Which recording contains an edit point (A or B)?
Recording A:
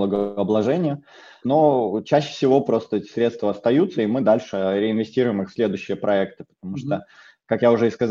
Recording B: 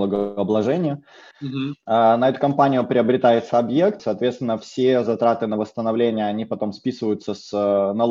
B